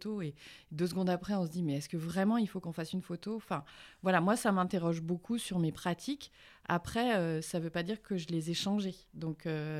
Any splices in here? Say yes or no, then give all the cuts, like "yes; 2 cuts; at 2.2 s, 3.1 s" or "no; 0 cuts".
no; 0 cuts